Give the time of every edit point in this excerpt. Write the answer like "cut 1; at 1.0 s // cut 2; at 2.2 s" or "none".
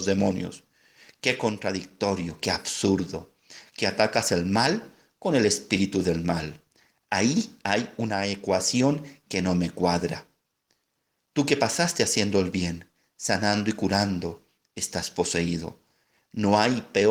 none